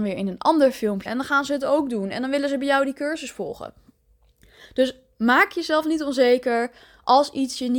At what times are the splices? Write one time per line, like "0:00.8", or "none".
0:01.1

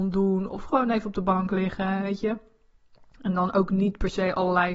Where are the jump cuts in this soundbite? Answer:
none

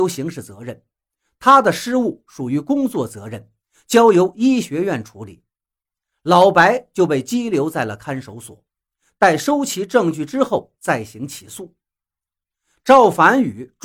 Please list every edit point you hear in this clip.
none

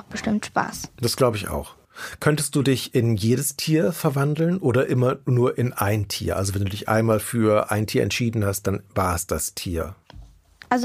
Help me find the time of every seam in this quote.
none

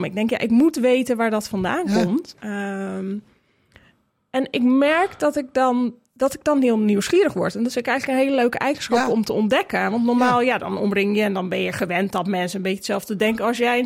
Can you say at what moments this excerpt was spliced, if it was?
0:02.3

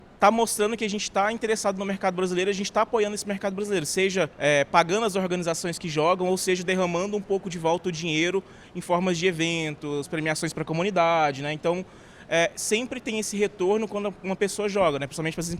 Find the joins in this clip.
0:04.3

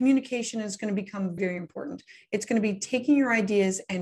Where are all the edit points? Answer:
0:01.4

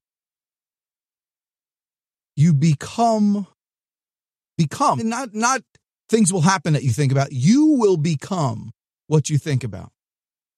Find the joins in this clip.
0:05.0

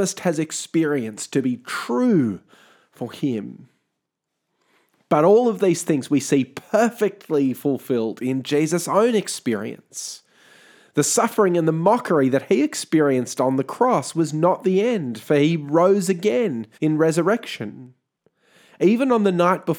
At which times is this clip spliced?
0:16.7

